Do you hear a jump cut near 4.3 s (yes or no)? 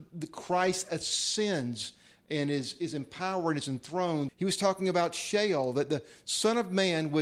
yes